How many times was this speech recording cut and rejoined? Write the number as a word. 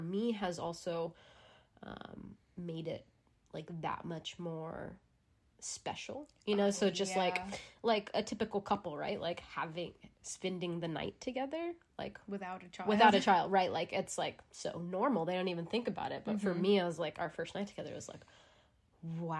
zero